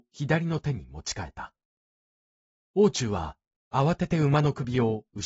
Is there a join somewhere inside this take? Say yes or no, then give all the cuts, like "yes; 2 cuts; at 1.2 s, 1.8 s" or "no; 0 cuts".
no; 0 cuts